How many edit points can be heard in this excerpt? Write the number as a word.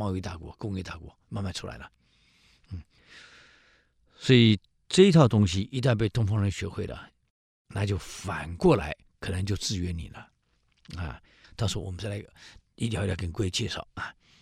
one